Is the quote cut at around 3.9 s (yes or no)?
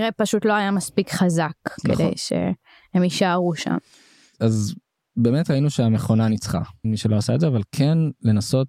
no